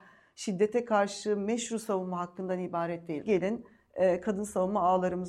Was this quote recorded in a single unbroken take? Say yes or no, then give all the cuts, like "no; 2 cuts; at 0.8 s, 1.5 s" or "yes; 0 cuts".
no; 1 cut; at 3.2 s